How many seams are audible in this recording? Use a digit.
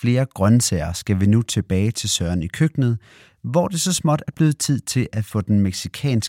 0